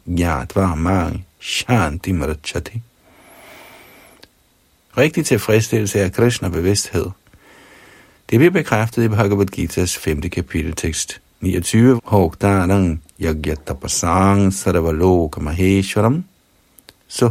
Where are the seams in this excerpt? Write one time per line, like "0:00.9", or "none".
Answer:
0:04.9
0:12.0